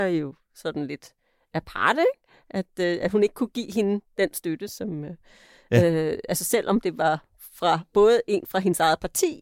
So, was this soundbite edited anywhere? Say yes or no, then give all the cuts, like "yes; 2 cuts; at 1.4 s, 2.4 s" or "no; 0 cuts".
no; 0 cuts